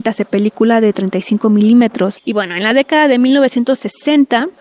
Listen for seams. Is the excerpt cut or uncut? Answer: cut